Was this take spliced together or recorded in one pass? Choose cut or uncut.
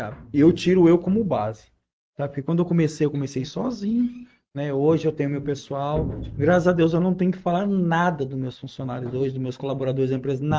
uncut